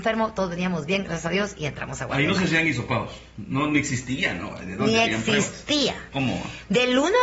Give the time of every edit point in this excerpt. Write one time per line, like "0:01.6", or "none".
none